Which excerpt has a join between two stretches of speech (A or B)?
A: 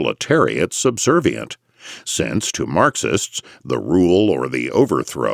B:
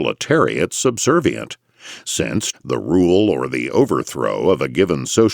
B